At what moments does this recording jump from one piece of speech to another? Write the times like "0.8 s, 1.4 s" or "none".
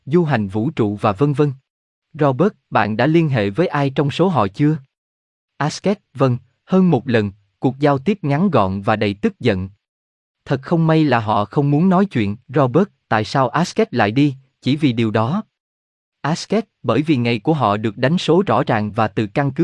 1.9 s, 12.4 s